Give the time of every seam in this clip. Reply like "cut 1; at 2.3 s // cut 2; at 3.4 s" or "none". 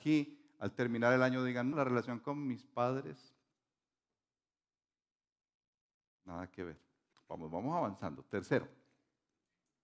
cut 1; at 1.7 s // cut 2; at 7.1 s